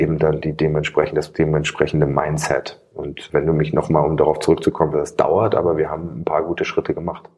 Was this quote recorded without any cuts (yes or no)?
no